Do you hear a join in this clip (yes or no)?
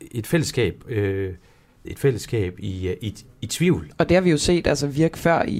yes